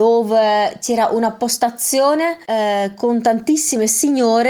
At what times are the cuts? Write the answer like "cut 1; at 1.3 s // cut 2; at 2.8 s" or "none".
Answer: cut 1; at 2.4 s

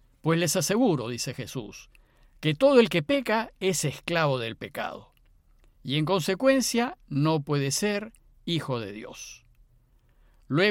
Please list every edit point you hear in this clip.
none

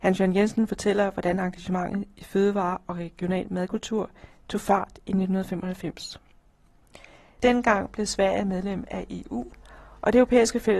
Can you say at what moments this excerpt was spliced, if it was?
none

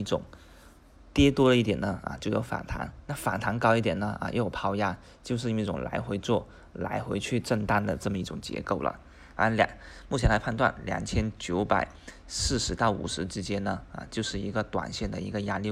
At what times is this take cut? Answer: cut 1; at 9.3 s

